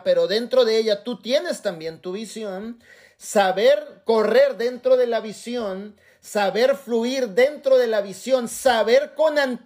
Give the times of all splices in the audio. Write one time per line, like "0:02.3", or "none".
none